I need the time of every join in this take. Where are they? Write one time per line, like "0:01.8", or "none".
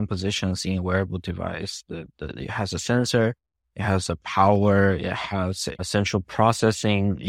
0:05.7